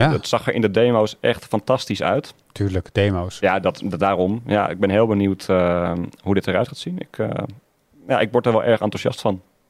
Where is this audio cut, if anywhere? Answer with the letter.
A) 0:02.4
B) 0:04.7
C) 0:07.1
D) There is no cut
D